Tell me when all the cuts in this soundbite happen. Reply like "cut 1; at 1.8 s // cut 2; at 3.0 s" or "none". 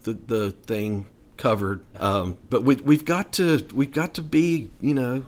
cut 1; at 1.9 s